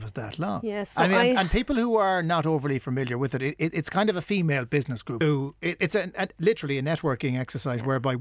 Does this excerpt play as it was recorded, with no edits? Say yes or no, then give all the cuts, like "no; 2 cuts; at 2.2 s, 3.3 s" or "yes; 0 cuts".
no; 1 cut; at 5.2 s